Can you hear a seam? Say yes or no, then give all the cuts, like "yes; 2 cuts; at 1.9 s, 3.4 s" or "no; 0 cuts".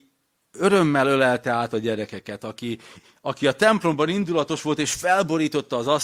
no; 0 cuts